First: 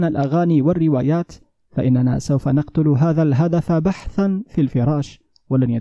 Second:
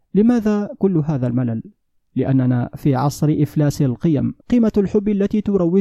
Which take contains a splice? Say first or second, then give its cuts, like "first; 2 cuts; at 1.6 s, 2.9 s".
second; 1 cut; at 4.4 s